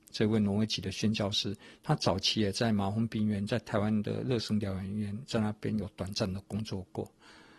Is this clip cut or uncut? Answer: uncut